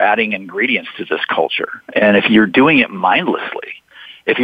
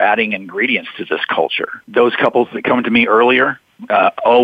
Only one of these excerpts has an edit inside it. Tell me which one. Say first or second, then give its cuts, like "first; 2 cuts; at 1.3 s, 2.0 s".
second; 1 cut; at 1.8 s